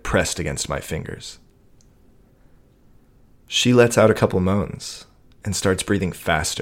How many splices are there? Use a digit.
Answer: 0